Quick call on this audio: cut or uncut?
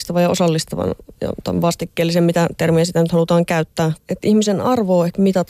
cut